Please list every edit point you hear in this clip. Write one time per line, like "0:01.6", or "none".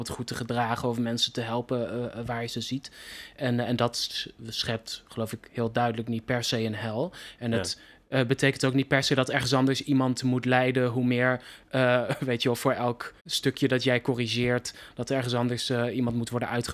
0:13.2